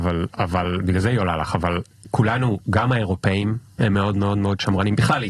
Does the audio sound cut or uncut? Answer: uncut